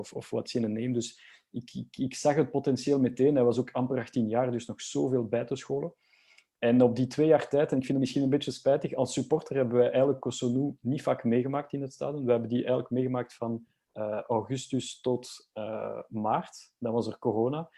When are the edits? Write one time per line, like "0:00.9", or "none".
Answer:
none